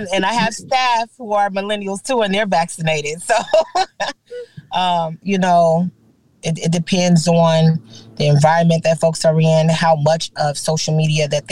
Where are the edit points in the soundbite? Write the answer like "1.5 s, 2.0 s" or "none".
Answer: 5.2 s